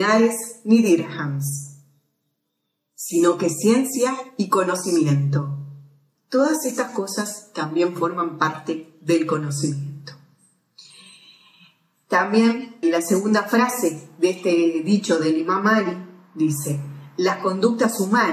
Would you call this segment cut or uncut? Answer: cut